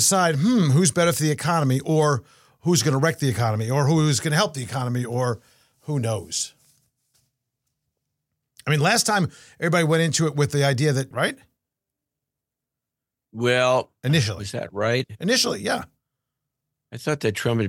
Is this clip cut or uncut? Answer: cut